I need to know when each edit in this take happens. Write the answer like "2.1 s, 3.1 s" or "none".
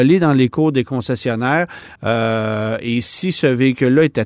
none